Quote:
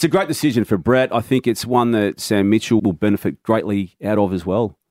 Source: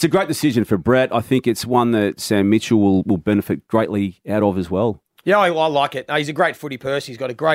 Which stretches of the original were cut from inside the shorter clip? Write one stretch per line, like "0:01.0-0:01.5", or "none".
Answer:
0:02.8-0:03.0

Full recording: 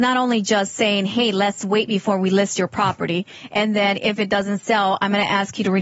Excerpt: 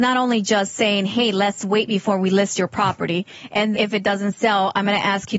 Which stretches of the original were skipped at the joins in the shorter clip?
0:03.7-0:04.0

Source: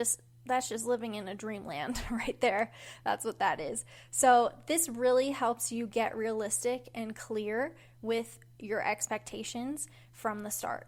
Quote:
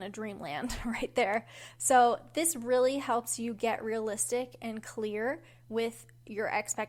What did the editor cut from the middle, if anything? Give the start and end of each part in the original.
0:03.0-0:04.1

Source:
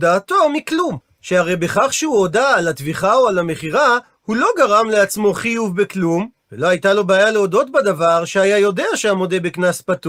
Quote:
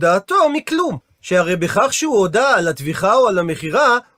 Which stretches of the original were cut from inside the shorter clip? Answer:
none

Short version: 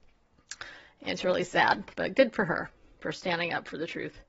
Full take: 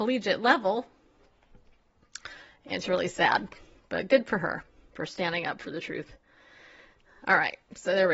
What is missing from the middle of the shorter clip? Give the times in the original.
0:03.6-0:03.9

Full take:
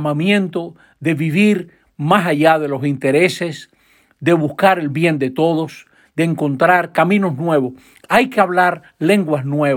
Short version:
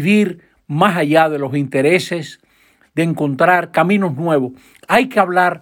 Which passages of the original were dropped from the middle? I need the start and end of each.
0:04.1-0:06.0

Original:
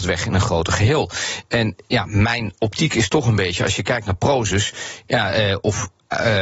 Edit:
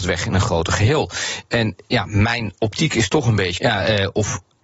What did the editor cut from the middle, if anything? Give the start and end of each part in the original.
0:03.6-0:05.1

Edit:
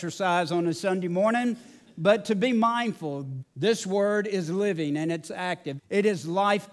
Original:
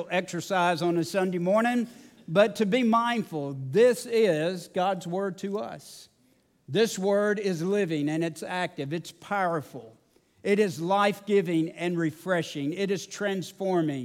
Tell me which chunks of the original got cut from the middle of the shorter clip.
0:03.7-0:06.5
0:08.9-0:10.3

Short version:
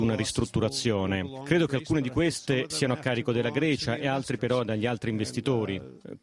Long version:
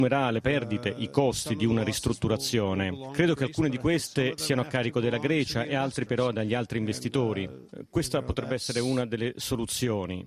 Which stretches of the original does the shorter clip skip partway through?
none

